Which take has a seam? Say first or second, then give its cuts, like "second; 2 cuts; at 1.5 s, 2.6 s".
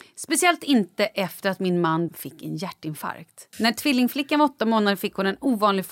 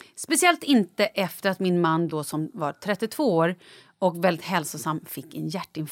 first; 2 cuts; at 2.1 s, 3.5 s